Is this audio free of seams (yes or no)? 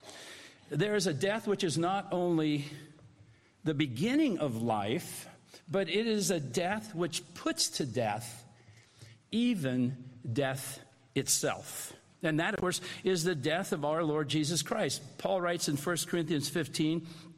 yes